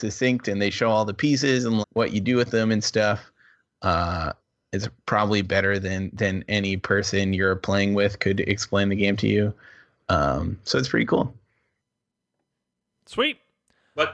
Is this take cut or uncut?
cut